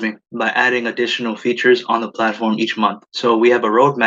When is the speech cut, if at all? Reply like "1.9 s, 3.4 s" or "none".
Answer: 3.1 s